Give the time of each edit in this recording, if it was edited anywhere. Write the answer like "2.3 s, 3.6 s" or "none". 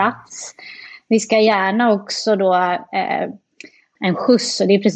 4.0 s